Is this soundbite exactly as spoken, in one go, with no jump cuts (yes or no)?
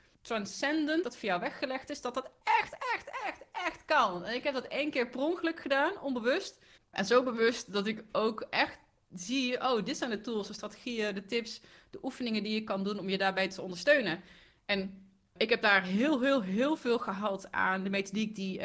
no